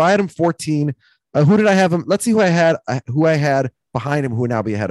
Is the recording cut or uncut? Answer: uncut